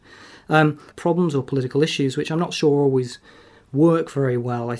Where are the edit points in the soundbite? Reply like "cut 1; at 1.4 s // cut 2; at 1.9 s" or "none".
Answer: cut 1; at 0.9 s